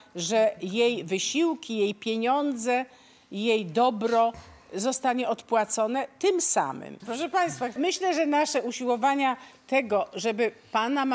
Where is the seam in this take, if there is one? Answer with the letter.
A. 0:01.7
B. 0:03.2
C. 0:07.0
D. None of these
C